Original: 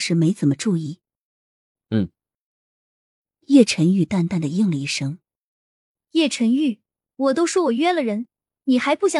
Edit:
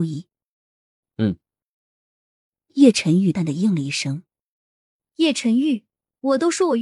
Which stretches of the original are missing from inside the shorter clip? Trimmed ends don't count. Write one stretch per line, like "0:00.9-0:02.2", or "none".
0:04.1-0:04.3